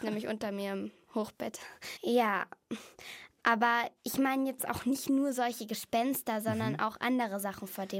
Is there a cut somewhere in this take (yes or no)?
yes